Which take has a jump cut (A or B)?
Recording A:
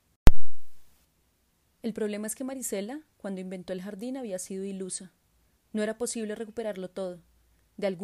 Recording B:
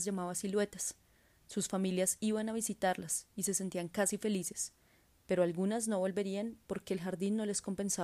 B